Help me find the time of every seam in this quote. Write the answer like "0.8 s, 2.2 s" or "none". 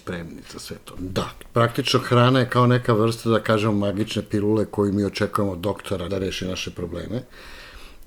1.0 s, 6.1 s